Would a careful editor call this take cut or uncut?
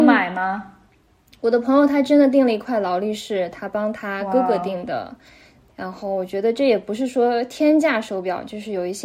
cut